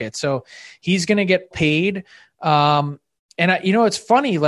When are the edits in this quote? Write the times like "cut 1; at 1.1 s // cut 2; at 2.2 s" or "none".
cut 1; at 1.5 s